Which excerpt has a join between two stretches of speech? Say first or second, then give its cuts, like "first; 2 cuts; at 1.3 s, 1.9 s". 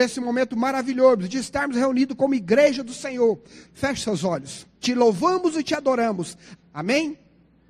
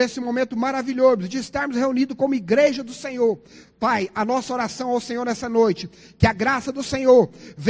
first; 3 cuts; at 3.7 s, 4.8 s, 6.6 s